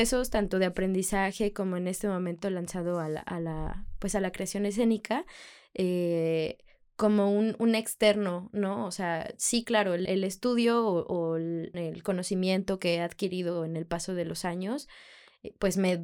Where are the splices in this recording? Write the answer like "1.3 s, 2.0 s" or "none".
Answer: 10.1 s, 11.7 s